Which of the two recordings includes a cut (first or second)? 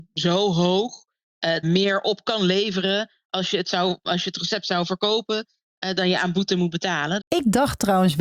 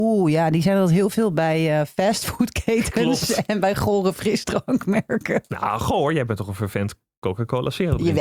first